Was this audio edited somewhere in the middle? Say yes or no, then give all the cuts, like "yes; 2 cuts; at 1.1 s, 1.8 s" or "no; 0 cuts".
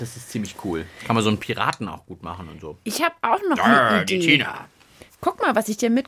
no; 0 cuts